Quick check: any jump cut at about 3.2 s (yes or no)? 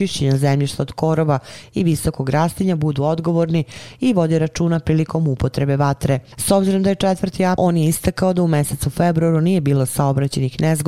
no